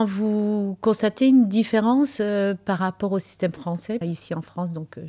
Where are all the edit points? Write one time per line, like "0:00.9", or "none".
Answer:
0:04.0